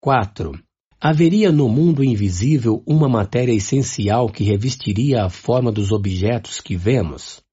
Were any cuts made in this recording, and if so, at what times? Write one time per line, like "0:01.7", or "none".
0:00.9